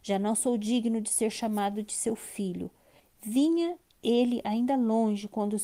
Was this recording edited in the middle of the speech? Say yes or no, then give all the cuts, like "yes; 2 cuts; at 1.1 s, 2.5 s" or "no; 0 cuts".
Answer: yes; 1 cut; at 3.0 s